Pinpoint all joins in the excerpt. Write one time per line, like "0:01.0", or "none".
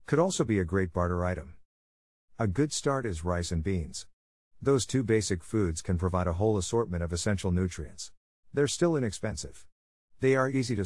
0:08.4